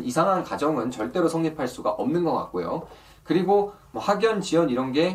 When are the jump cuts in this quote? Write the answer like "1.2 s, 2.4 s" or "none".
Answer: none